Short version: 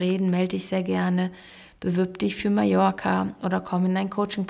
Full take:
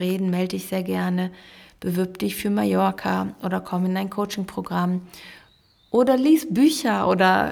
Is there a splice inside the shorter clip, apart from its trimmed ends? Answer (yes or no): no